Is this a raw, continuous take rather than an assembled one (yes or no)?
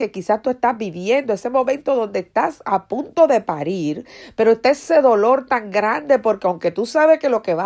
yes